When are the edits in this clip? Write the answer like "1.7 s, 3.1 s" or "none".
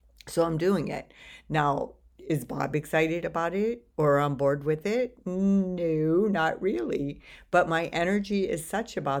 none